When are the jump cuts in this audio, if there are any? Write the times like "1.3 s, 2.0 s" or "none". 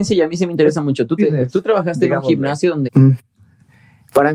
1.2 s, 2.8 s